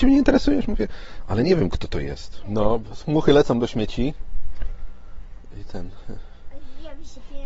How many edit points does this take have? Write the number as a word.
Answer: one